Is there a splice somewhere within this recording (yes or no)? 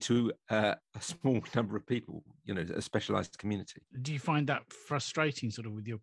no